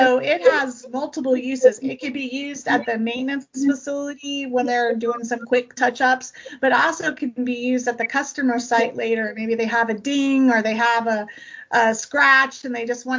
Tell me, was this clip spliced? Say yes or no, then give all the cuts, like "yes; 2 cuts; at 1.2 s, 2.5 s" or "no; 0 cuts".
no; 0 cuts